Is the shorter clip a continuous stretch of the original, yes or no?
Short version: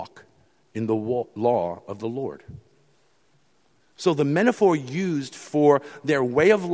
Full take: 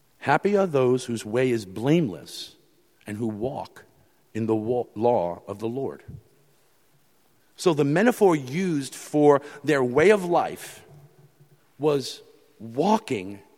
yes